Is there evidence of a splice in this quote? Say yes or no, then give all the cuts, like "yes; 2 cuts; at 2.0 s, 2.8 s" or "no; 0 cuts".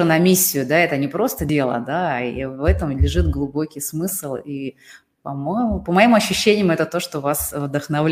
no; 0 cuts